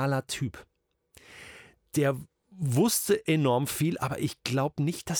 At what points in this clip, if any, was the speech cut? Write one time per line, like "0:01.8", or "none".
none